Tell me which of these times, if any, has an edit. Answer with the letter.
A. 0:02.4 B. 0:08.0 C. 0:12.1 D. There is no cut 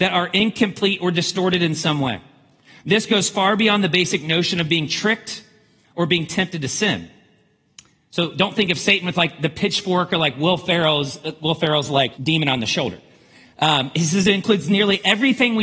C